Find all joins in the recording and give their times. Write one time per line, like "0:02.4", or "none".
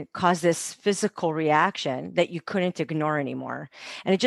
none